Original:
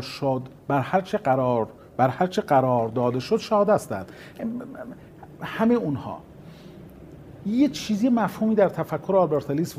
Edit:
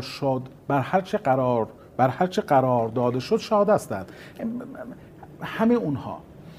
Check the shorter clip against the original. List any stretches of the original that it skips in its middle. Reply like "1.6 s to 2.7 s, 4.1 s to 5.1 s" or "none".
none